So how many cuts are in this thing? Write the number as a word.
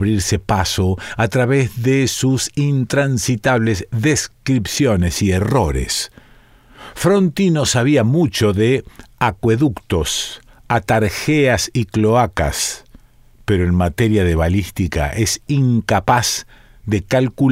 zero